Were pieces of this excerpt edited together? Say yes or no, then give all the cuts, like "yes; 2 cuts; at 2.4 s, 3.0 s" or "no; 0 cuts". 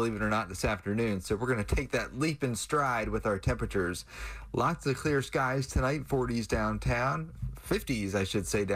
no; 0 cuts